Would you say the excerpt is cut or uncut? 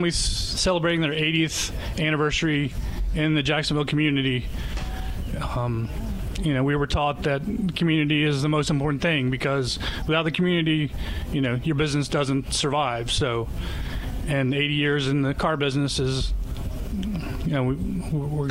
cut